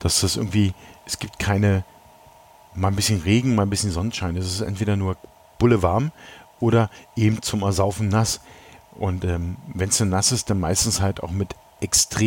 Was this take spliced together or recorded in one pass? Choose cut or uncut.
uncut